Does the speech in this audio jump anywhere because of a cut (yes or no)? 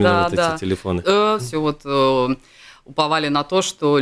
yes